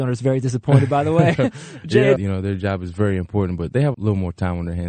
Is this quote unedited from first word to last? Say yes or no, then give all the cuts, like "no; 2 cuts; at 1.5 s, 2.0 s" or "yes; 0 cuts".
no; 2 cuts; at 2.2 s, 3.9 s